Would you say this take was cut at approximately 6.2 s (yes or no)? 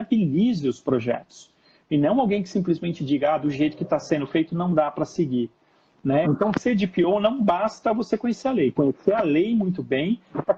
yes